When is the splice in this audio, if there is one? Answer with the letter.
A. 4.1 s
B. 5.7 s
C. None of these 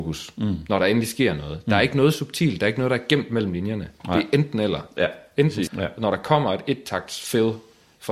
B